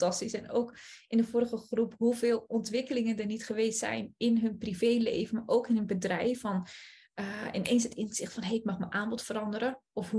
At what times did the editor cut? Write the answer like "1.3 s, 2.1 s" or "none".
none